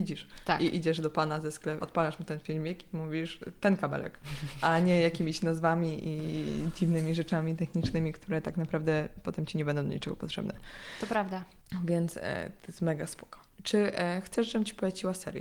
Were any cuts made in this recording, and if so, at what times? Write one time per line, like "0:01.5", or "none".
0:01.8